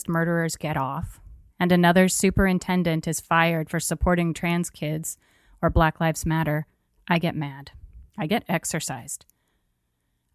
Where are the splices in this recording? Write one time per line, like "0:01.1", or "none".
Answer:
0:01.5
0:08.1